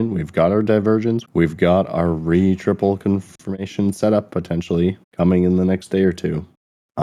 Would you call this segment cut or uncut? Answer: cut